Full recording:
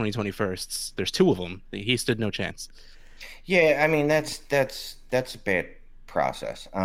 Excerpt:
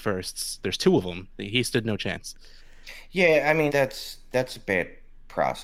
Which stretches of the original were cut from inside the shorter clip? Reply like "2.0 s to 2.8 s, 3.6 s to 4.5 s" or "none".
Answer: 4.0 s to 4.5 s